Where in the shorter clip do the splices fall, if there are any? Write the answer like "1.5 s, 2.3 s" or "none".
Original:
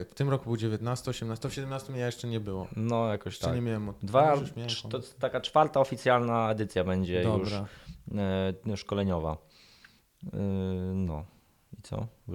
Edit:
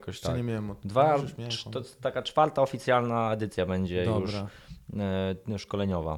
none